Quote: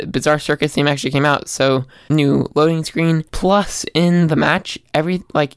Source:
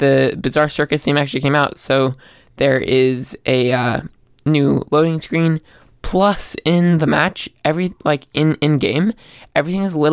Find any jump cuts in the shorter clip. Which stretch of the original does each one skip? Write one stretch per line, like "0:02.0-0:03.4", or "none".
0:02.4-0:04.4
0:05.6-0:06.0